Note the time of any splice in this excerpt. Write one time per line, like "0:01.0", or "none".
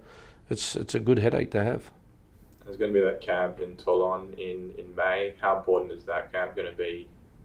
none